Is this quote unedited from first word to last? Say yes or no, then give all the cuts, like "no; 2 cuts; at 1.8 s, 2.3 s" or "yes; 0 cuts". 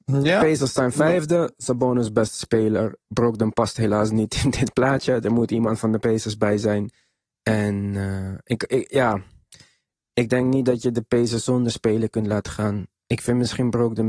yes; 0 cuts